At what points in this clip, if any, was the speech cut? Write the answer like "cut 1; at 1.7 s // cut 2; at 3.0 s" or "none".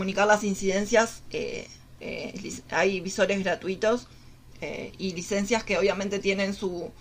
cut 1; at 2.0 s